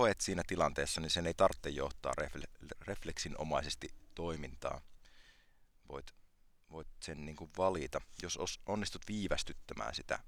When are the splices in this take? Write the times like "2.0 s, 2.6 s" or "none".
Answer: none